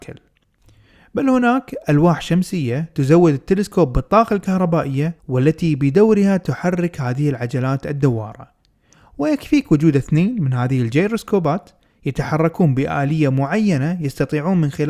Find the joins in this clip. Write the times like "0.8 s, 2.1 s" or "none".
5.2 s